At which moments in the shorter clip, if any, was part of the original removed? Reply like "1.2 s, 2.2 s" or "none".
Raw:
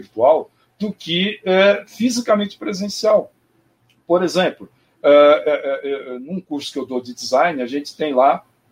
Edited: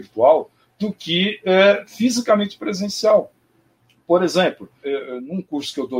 4.8 s